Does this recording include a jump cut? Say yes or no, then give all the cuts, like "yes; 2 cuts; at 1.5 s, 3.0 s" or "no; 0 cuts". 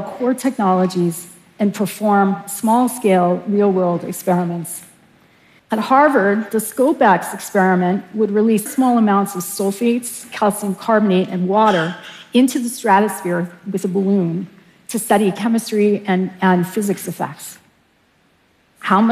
yes; 2 cuts; at 5.6 s, 8.7 s